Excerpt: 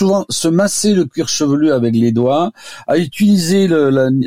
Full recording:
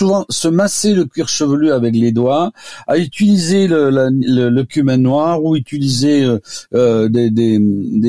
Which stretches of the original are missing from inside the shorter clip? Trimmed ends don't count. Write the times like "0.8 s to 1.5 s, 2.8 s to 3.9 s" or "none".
none